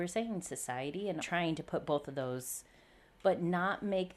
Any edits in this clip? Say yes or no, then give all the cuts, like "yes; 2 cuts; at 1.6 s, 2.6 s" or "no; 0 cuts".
yes; 1 cut; at 1.2 s